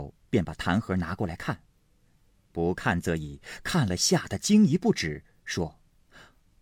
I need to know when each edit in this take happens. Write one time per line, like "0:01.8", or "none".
none